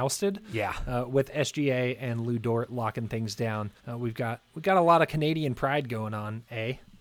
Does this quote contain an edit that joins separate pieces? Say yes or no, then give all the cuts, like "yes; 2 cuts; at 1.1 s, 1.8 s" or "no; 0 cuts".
yes; 1 cut; at 3.8 s